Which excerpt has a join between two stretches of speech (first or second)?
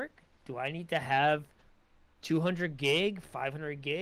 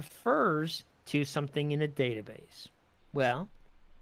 second